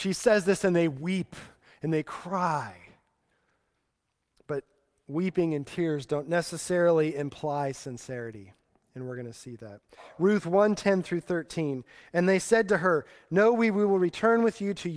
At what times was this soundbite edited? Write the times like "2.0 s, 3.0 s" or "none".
none

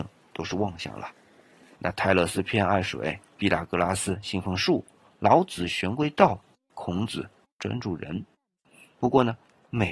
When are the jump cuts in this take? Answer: 1.8 s

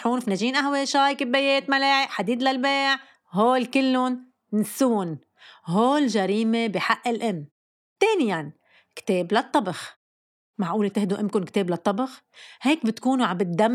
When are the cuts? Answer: none

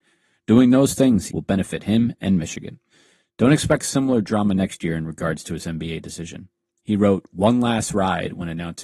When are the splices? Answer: 1.3 s

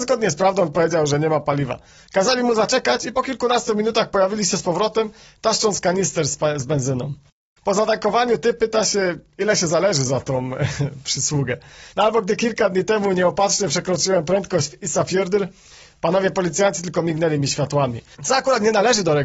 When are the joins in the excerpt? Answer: 11.9 s

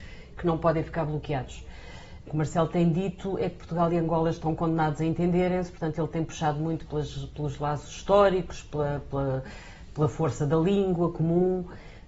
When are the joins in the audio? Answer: 2.3 s

